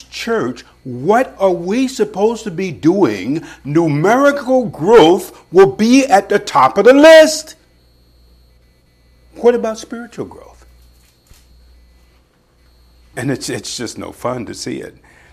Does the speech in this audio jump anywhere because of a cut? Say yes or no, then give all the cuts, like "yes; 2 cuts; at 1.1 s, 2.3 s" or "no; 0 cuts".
yes; 1 cut; at 13.1 s